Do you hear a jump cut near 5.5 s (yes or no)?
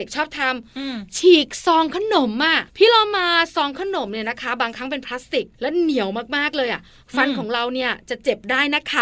yes